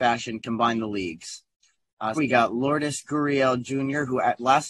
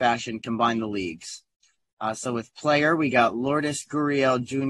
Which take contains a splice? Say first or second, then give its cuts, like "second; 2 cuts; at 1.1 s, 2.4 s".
first; 1 cut; at 2.2 s